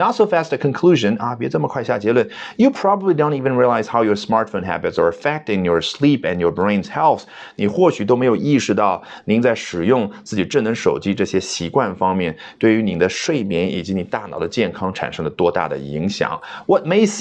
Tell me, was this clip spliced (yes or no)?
no